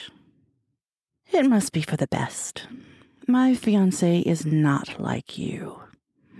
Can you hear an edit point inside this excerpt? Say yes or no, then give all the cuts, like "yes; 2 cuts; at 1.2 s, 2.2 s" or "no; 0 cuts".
yes; 1 cut; at 1.2 s